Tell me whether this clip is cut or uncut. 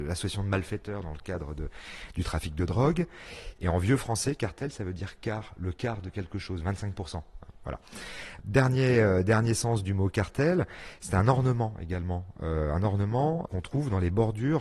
cut